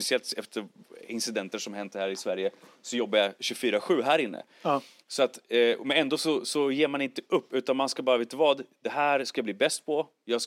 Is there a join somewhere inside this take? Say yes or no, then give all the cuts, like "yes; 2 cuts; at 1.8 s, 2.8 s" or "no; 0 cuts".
no; 0 cuts